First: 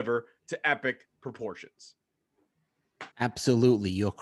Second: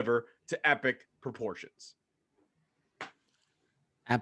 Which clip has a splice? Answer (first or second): first